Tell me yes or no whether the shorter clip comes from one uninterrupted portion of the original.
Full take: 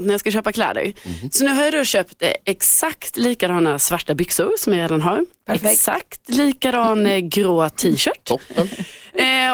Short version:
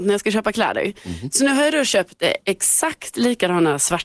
yes